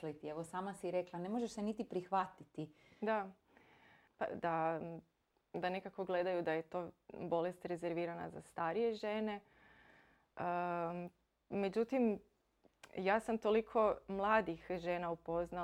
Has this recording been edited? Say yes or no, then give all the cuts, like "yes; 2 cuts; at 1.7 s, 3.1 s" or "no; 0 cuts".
yes; 1 cut; at 4.3 s